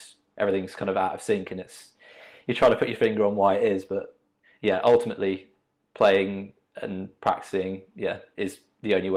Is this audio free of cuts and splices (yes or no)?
yes